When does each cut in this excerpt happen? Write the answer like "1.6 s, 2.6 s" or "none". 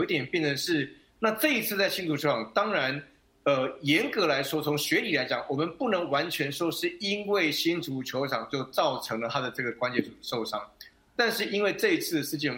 1.1 s